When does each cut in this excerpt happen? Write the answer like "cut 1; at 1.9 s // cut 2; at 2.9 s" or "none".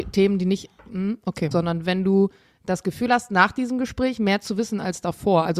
cut 1; at 1.5 s

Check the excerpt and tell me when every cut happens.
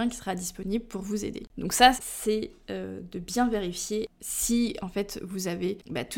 cut 1; at 2.0 s

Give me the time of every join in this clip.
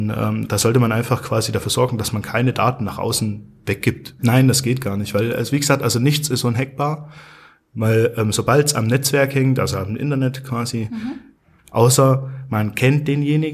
cut 1; at 4.2 s // cut 2; at 11.6 s

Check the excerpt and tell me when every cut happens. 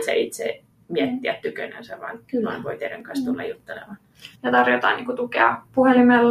cut 1; at 4.4 s

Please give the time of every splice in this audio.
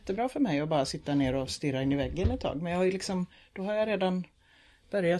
none

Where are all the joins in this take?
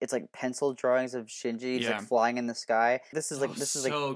cut 1; at 3.1 s

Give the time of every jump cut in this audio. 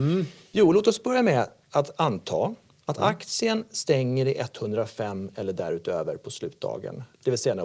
none

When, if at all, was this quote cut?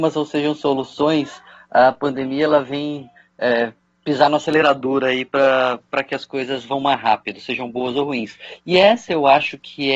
none

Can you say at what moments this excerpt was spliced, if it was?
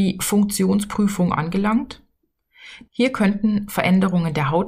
cut 1; at 2.9 s

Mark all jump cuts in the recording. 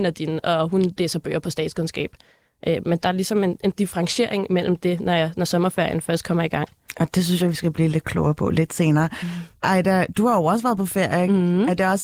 none

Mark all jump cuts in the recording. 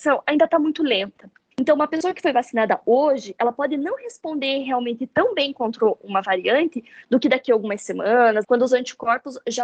cut 1; at 1.5 s // cut 2; at 8.4 s

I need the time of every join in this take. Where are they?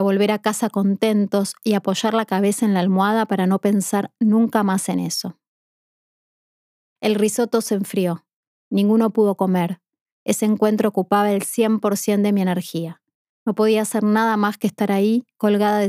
cut 1; at 10.1 s

